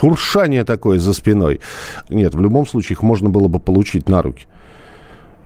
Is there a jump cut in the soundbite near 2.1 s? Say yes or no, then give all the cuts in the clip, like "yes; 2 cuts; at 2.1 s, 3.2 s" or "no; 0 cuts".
yes; 1 cut; at 2.1 s